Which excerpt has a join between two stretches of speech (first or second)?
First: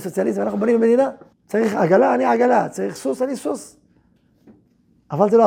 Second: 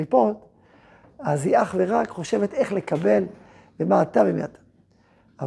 first